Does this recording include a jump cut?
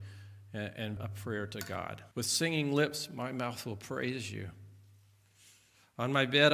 yes; 2 cuts; at 1.0 s, 2.1 s

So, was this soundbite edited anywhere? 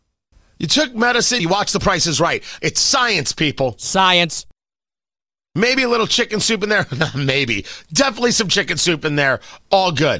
yes; 2 cuts; at 1.4 s, 2.6 s

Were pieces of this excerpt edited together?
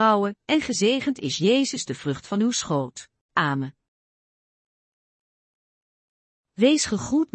yes; 1 cut; at 3.3 s

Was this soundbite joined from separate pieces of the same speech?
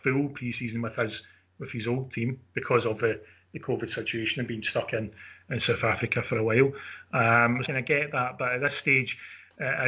yes; 1 cut; at 7.6 s

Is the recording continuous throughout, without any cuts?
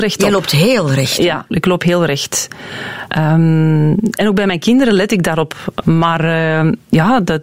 no; 3 cuts; at 1.5 s, 3.1 s, 5.8 s

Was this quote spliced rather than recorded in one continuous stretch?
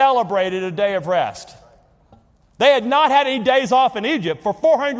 no; 0 cuts

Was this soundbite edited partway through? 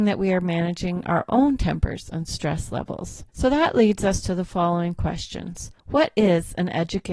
yes; 2 cuts; at 3.3 s, 5.8 s

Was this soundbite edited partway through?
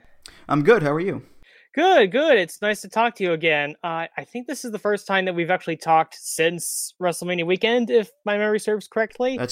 no; 0 cuts

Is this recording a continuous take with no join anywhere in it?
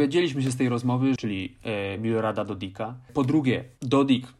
no; 1 cut; at 1.2 s

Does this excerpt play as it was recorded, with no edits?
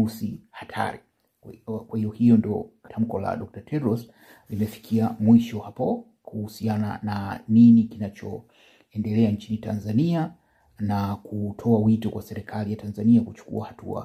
no; 1 cut; at 2.9 s

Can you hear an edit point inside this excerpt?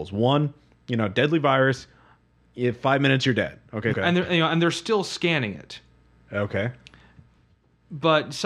yes; 1 cut; at 3.9 s

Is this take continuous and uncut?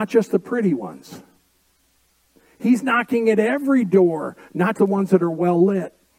no; 1 cut; at 4.8 s

